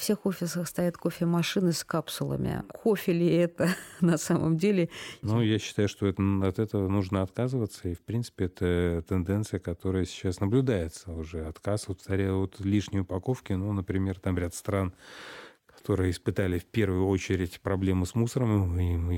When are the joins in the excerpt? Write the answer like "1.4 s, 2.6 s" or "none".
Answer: 5.2 s